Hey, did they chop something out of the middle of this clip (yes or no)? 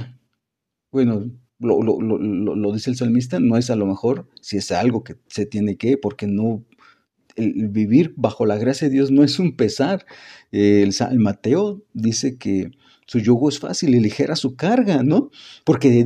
no